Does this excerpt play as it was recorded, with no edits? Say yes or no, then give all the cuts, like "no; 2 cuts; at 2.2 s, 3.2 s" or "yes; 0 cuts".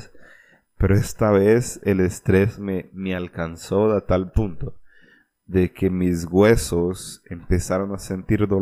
yes; 0 cuts